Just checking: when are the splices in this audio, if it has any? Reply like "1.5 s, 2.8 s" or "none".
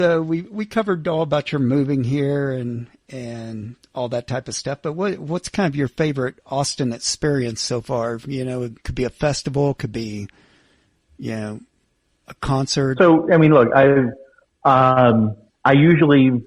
8.8 s, 13.0 s